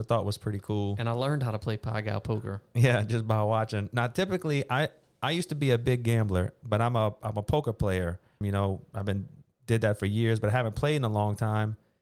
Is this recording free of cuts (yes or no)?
no